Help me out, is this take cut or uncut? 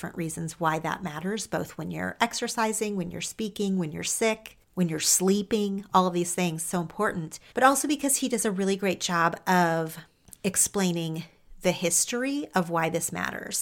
cut